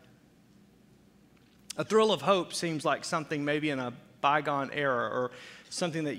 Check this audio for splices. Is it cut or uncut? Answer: uncut